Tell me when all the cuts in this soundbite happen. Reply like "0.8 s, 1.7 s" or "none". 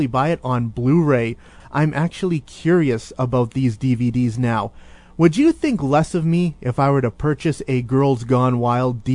1.6 s